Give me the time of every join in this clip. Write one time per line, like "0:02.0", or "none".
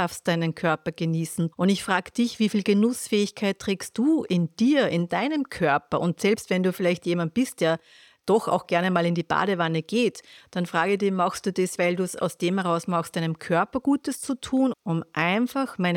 0:01.5
0:11.8
0:14.7